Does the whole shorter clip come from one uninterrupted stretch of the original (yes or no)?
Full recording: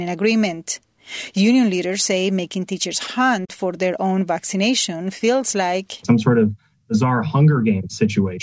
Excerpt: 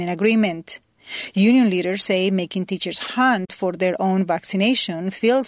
yes